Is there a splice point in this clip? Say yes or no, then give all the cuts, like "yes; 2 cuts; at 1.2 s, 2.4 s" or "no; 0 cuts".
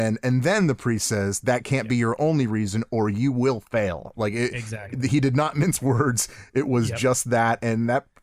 no; 0 cuts